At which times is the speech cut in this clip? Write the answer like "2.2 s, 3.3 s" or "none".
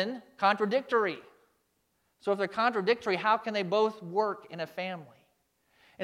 none

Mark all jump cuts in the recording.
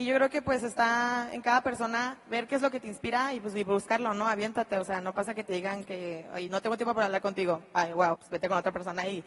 8.1 s

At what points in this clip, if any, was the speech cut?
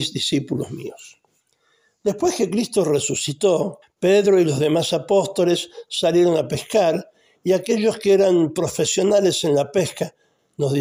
3.8 s

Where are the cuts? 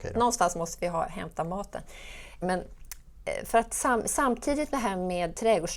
2.4 s

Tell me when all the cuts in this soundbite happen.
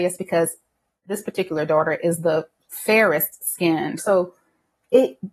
4.0 s

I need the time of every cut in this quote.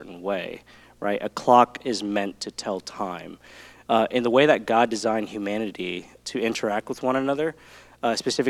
3.8 s, 6.2 s

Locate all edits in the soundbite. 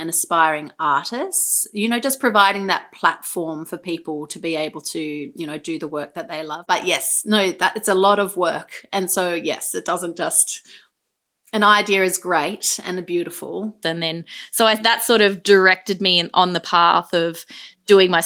13.8 s

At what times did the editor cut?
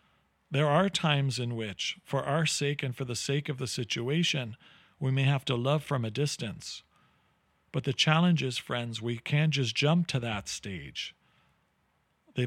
none

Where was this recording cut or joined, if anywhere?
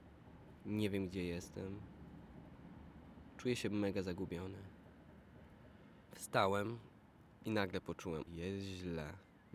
6.1 s, 8.3 s

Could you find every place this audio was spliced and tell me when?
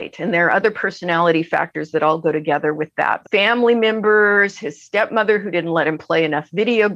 3.2 s

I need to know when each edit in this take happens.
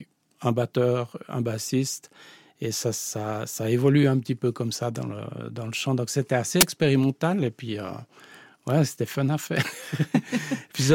none

